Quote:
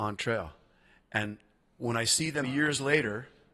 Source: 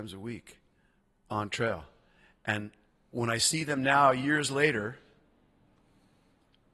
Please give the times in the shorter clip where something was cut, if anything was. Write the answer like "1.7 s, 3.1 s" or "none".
2.4 s